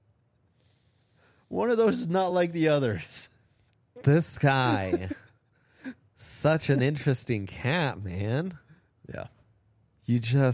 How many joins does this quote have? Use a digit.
0